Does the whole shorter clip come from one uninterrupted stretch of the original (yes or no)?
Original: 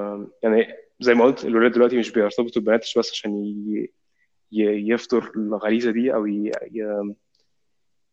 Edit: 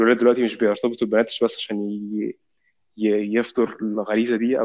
yes